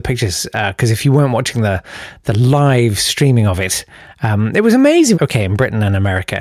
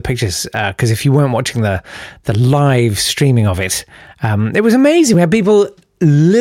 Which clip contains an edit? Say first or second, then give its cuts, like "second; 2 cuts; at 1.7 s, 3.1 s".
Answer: first; 1 cut; at 5.1 s